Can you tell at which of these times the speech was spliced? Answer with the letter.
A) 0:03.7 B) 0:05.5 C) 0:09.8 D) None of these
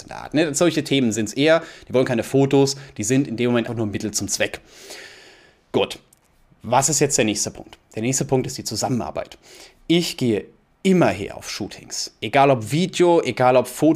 A